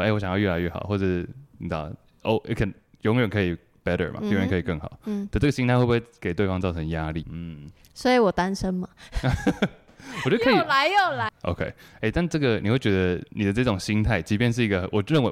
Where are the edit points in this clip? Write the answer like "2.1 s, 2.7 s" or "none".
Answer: 7.2 s, 11.3 s